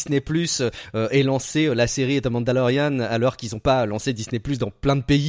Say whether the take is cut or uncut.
uncut